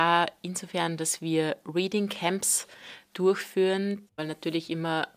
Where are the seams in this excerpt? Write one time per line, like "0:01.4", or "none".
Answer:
0:04.1